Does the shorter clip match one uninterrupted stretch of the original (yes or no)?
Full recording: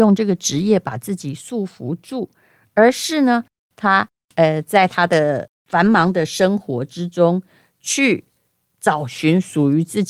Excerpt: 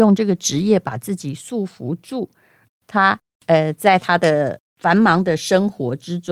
no